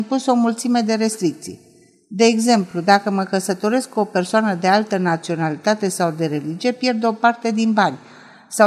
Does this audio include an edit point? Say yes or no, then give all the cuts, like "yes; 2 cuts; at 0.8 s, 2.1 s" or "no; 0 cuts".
no; 0 cuts